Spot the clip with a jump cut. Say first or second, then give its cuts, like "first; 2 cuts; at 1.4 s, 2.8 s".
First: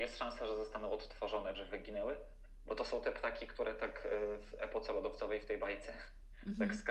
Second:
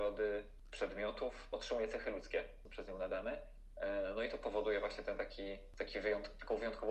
first; 1 cut; at 1.5 s